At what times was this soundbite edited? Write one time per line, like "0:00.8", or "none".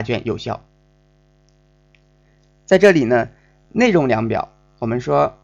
none

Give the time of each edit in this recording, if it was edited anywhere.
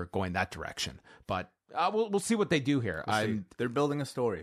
none

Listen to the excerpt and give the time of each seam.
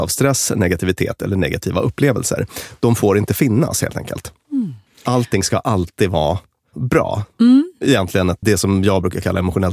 0:08.4

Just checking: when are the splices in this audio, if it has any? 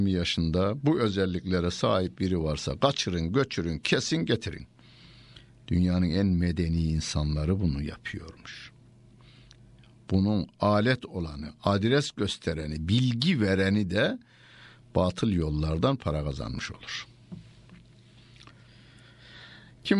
none

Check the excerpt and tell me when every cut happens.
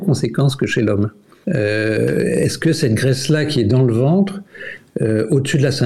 0:01.4

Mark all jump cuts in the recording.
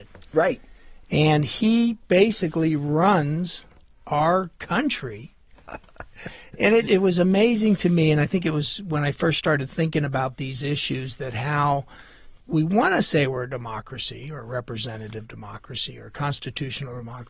0:05.5
0:06.9
0:12.4

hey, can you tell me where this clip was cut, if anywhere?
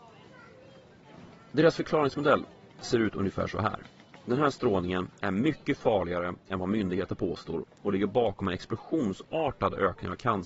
0:04.1

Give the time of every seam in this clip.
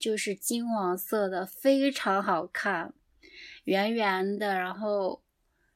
none

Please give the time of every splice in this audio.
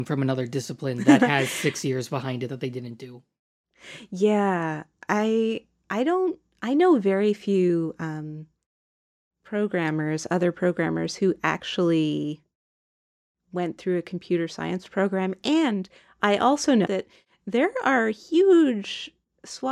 0:16.8

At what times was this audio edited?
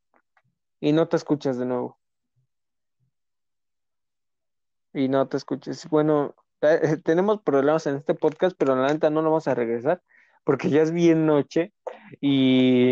none

